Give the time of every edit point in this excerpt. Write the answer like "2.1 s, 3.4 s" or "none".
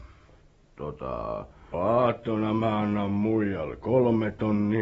1.7 s